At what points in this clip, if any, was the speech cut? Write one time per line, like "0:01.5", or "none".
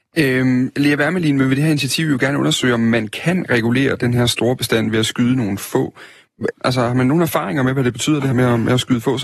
0:06.5
0:08.3